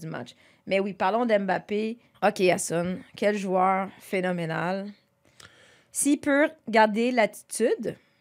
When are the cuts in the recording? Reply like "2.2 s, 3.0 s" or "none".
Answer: 2.1 s